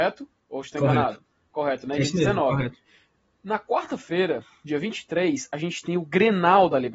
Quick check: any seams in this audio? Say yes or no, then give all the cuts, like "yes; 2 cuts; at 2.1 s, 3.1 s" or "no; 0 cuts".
no; 0 cuts